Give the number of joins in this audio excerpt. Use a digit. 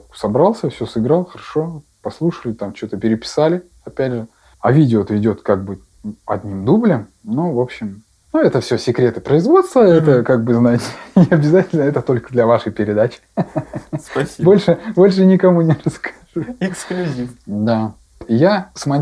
1